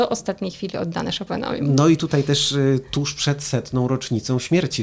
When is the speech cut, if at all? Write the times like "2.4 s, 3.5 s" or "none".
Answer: none